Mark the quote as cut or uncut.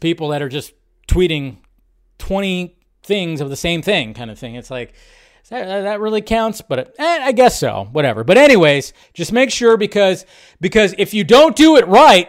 uncut